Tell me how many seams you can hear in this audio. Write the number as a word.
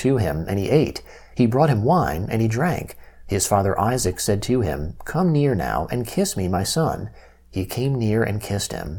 zero